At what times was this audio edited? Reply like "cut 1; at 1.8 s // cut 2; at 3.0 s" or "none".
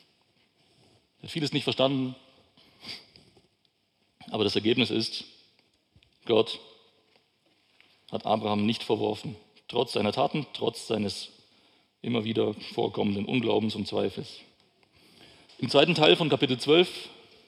cut 1; at 15.5 s